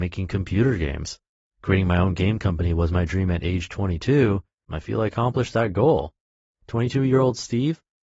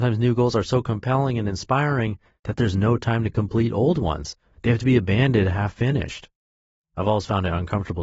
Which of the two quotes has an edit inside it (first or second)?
first